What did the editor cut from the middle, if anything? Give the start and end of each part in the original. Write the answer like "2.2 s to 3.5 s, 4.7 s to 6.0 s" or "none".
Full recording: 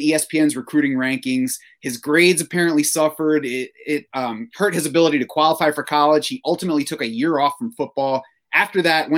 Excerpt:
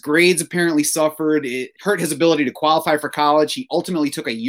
3.8 s to 4.5 s

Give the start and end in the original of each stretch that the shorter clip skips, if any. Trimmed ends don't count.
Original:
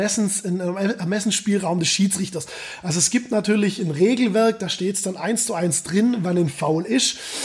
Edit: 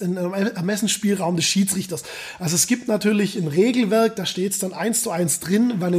none

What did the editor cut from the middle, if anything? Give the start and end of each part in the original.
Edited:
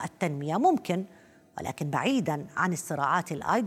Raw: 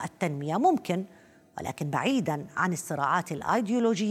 none

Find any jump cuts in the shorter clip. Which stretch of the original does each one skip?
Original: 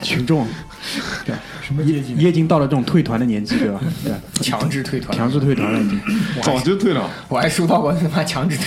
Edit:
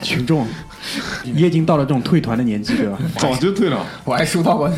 1.2 s to 2.1 s, 4.0 s to 6.4 s

